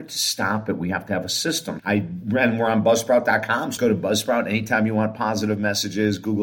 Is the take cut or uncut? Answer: cut